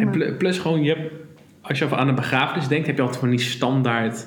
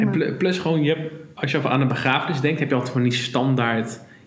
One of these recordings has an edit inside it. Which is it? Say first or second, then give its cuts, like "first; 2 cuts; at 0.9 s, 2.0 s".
second; 1 cut; at 1.3 s